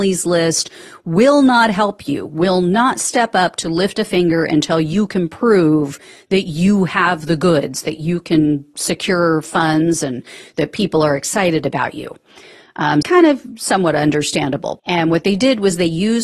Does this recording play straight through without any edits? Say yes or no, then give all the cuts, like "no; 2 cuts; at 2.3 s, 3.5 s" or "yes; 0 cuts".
no; 2 cuts; at 13.0 s, 14.8 s